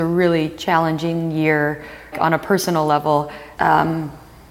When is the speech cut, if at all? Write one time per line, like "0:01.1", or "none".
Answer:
0:02.1
0:03.6